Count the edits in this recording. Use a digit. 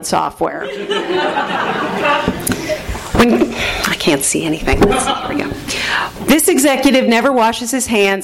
1